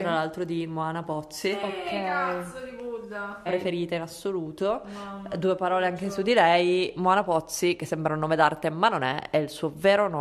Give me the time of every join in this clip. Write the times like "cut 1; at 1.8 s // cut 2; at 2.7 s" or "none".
cut 1; at 3.5 s

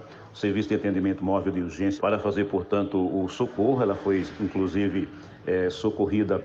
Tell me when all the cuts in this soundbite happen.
cut 1; at 2.0 s

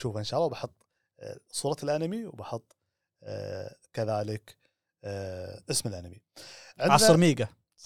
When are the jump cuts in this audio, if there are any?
none

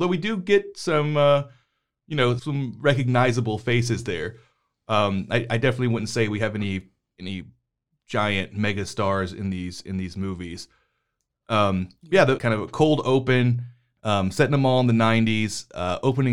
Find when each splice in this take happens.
cut 1; at 2.4 s // cut 2; at 12.4 s

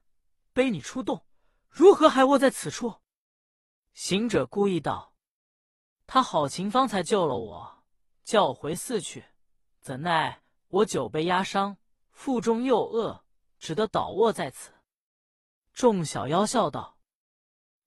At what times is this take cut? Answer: none

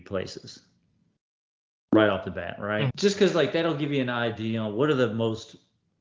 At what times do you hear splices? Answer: cut 1; at 2.9 s

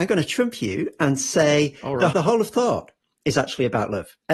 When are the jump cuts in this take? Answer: cut 1; at 2.1 s

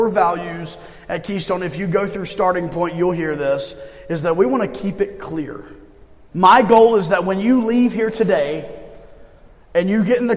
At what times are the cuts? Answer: cut 1; at 6.3 s

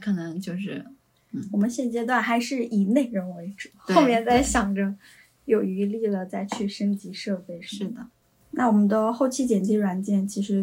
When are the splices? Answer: none

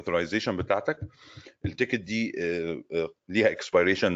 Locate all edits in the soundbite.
cut 1; at 3.2 s

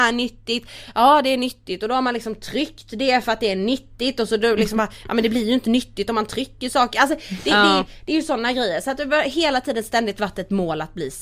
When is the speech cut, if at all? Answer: none

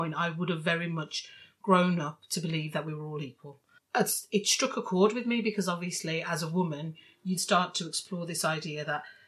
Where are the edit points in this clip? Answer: cut 1; at 3.8 s // cut 2; at 7.4 s

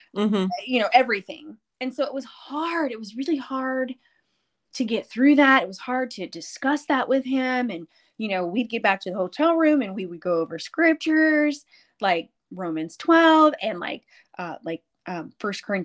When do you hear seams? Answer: none

